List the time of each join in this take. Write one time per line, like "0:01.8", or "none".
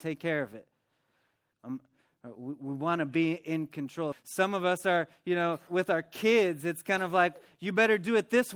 0:01.5
0:04.1
0:05.7